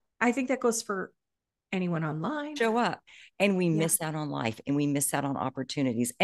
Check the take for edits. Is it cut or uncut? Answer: cut